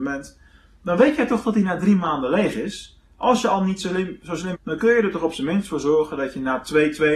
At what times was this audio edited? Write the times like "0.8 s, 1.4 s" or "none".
4.5 s